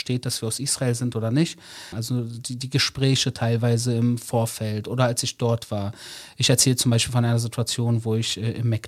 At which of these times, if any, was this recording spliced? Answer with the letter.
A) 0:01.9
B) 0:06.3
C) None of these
A